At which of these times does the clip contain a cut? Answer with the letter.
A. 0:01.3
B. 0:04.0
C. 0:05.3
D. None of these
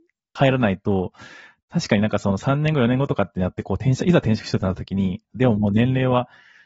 C